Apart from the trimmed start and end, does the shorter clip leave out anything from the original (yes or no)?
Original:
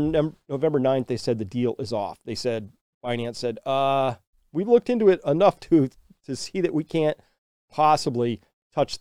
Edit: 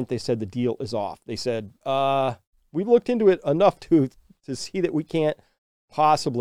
yes